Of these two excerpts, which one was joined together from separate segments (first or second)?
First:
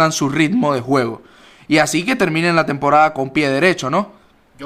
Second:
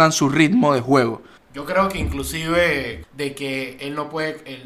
second